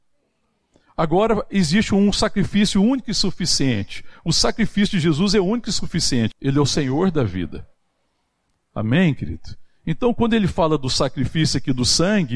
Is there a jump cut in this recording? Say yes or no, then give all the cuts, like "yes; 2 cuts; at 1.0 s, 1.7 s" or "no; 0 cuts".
yes; 1 cut; at 6.3 s